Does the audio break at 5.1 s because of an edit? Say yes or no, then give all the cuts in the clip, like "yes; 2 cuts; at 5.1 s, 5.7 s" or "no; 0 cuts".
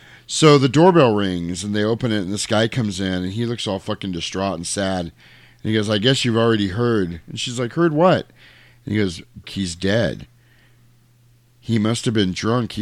no; 1 cut; at 9.4 s